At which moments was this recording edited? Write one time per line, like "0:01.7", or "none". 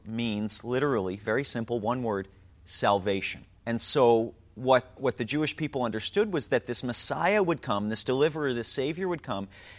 0:03.6
0:05.0